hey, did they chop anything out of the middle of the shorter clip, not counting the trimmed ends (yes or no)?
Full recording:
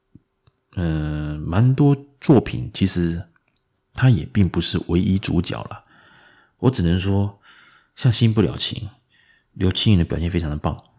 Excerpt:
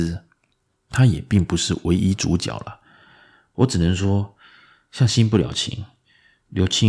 no